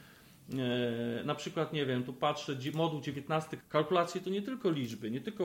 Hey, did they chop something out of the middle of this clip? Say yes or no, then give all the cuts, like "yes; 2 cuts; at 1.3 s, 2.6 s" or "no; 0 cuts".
yes; 1 cut; at 3.6 s